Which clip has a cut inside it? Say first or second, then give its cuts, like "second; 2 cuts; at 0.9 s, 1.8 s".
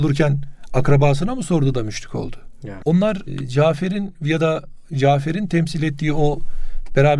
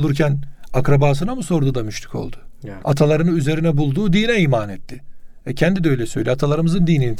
first; 1 cut; at 2.8 s